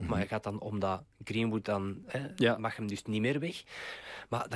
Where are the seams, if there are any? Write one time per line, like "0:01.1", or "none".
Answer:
0:02.1